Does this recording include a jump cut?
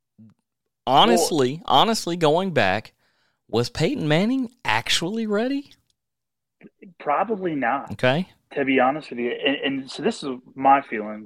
no; 0 cuts

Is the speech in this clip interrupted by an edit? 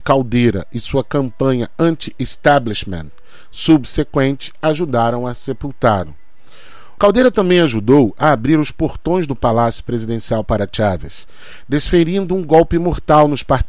yes; 1 cut; at 7.0 s

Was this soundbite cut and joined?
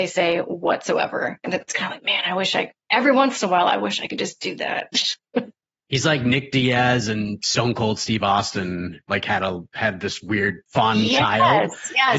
yes; 1 cut; at 10.7 s

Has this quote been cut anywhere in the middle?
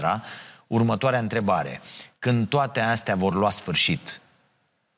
no; 0 cuts

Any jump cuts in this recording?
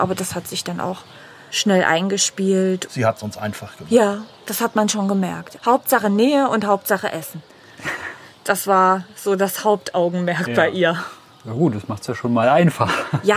no; 0 cuts

